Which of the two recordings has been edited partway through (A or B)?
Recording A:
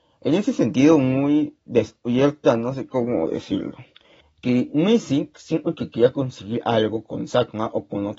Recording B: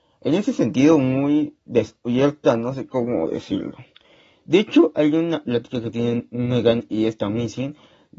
A